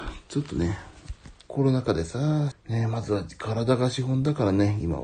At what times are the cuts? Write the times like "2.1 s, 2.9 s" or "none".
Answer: 1.5 s, 2.5 s